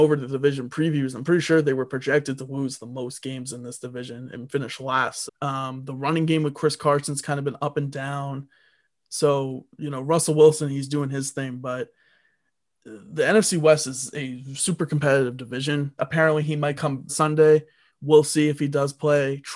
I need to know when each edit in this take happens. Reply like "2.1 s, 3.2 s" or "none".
5.3 s, 16.0 s, 17.1 s